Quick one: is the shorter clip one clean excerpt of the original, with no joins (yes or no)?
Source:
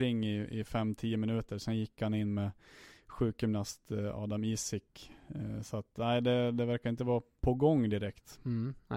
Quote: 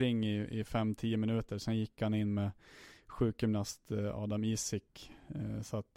yes